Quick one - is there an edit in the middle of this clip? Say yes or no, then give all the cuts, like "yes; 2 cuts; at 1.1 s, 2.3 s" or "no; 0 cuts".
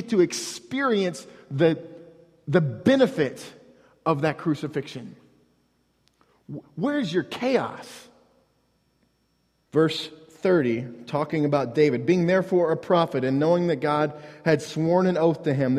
yes; 1 cut; at 9.7 s